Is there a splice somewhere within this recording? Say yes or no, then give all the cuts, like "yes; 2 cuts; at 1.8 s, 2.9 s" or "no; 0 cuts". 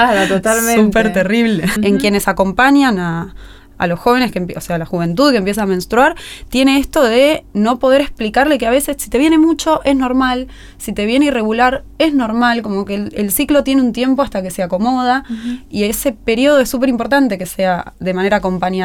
yes; 1 cut; at 1.8 s